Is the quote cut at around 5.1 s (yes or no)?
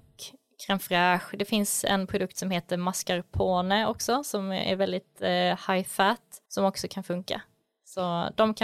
no